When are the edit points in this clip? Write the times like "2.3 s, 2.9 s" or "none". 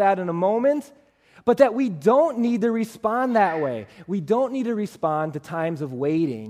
none